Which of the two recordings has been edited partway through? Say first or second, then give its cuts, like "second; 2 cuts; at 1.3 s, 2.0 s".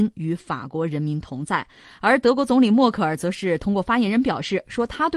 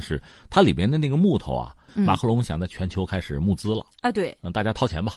second; 1 cut; at 1.9 s